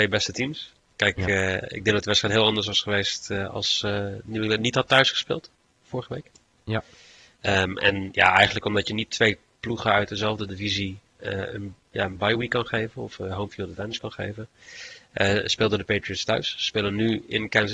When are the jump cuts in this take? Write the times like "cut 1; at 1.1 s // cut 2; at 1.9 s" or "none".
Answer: cut 1; at 11.8 s